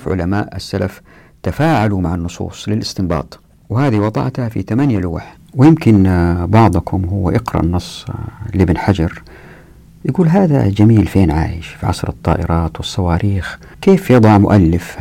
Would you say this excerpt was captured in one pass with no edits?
no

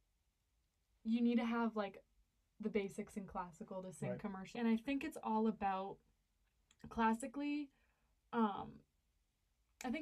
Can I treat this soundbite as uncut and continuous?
no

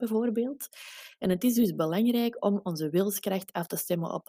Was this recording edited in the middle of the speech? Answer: no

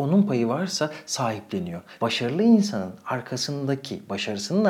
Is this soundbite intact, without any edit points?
no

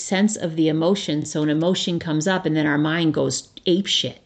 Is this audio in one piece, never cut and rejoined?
yes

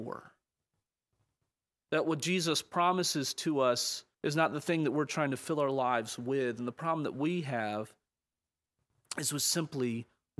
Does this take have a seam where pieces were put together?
yes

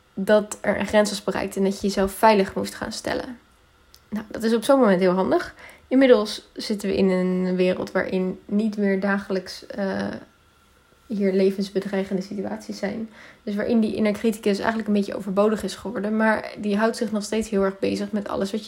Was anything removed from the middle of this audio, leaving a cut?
no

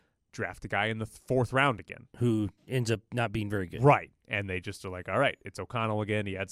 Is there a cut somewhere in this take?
yes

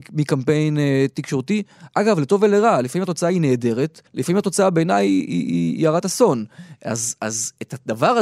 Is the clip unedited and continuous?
no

